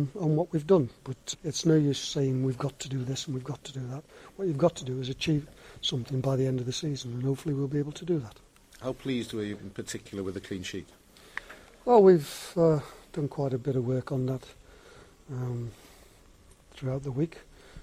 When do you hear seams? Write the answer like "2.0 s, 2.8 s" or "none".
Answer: 1.3 s